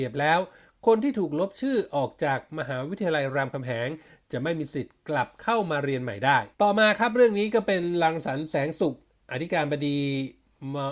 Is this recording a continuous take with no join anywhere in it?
no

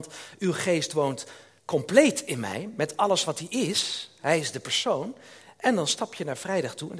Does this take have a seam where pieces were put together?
no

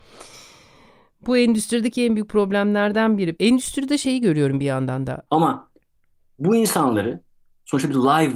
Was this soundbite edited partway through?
yes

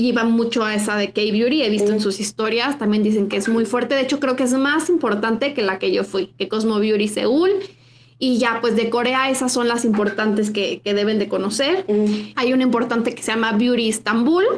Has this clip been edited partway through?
yes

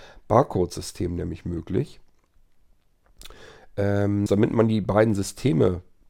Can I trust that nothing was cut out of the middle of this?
no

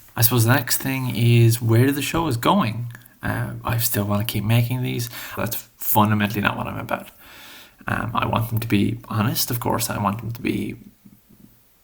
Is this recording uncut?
no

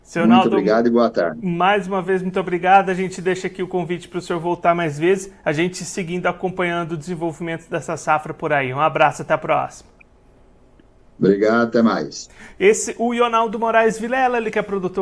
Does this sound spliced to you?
no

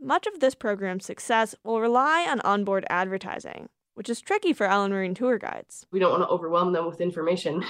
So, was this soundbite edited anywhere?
no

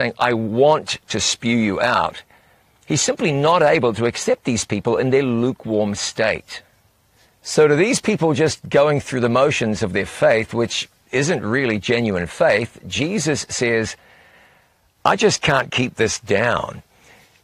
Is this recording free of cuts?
yes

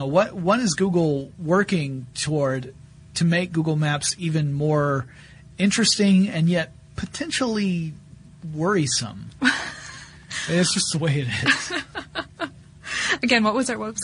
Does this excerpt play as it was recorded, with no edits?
yes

